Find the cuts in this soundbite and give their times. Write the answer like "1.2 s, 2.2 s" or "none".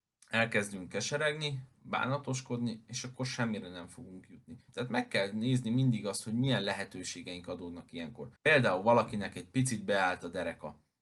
4.7 s, 8.4 s